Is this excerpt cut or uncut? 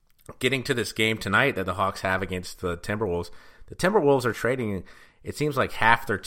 uncut